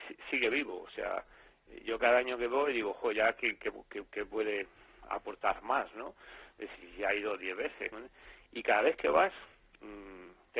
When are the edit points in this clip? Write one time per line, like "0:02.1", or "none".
0:07.9